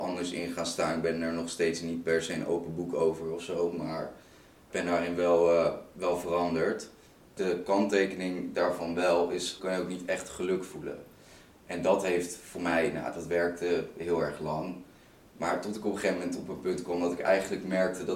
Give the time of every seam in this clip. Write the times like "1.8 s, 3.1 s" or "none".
9.6 s